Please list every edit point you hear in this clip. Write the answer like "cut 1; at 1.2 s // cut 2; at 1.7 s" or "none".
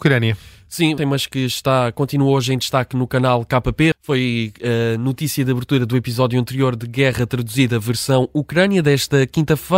cut 1; at 1.0 s // cut 2; at 3.9 s